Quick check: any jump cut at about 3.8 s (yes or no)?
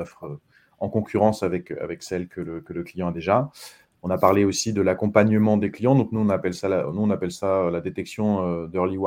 no